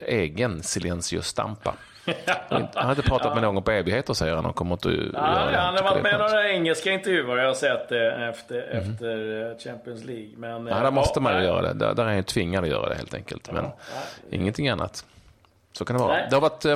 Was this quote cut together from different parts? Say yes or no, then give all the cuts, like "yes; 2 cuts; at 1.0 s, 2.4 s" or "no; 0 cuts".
no; 0 cuts